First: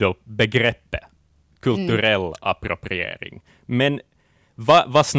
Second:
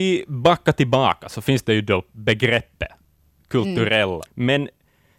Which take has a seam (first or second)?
second